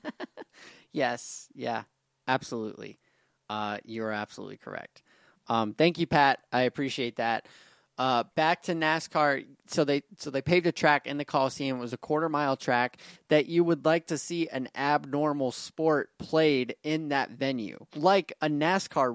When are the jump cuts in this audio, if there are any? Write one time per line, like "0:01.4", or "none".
0:13.2